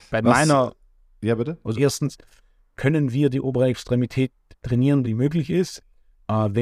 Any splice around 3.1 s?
no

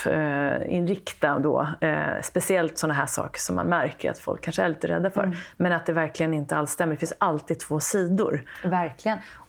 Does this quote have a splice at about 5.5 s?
no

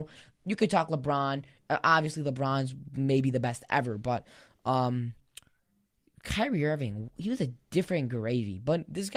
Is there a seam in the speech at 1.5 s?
no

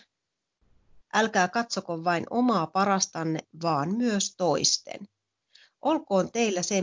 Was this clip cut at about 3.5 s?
no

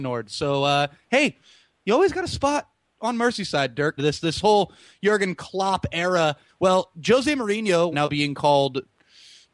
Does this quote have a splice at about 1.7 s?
no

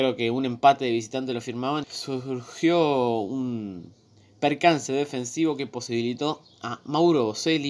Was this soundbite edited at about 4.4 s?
no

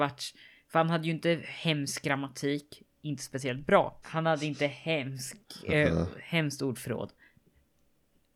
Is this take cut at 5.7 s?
no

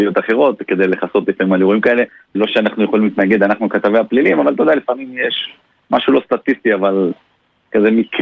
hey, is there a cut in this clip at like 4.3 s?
no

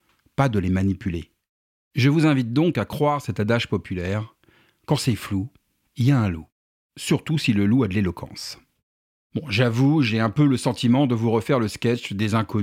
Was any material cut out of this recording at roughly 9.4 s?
no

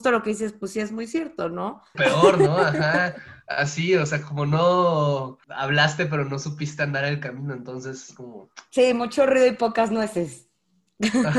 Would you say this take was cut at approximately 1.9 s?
yes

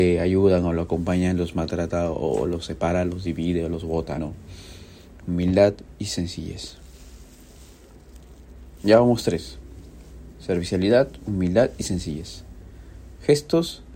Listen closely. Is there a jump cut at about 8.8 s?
no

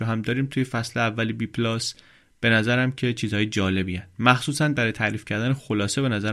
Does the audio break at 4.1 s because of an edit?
no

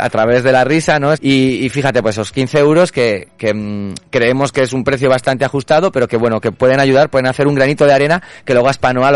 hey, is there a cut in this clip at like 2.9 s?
no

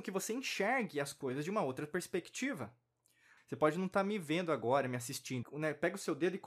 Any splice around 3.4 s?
yes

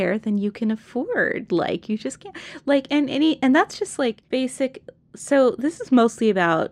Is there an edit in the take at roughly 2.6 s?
no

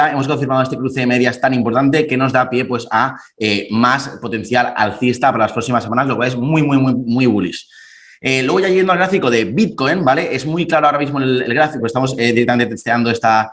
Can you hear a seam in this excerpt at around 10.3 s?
no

